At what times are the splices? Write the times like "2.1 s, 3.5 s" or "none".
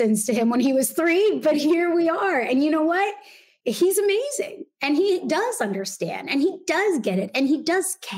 none